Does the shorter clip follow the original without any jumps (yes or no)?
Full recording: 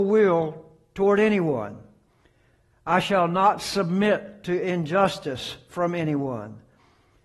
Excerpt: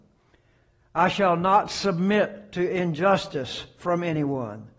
yes